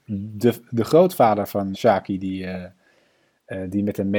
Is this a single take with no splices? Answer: no; 1 cut; at 1.7 s

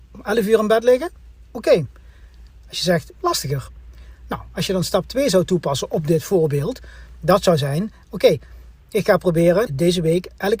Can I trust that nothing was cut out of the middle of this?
no; 2 cuts; at 3.1 s, 9.7 s

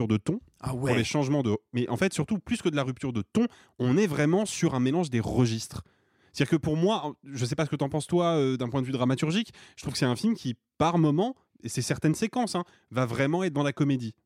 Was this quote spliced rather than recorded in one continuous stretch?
no; 0 cuts

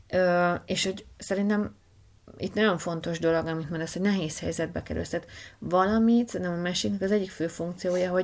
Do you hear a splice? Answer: no; 0 cuts

